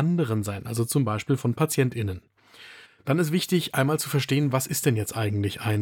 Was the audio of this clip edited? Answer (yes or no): yes